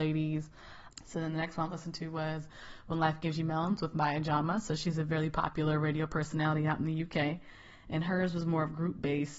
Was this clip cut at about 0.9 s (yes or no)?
yes